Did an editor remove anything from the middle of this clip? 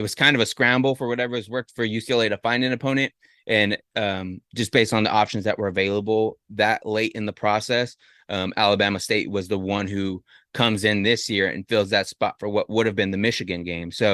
no; 0 cuts

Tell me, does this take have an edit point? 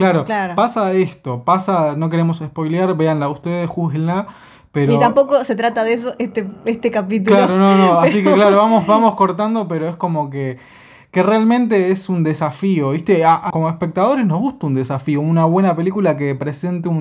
yes; 1 cut; at 13.5 s

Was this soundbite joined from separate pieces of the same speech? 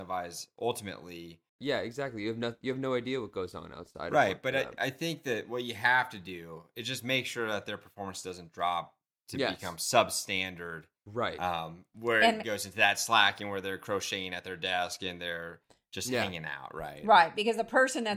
no; 0 cuts

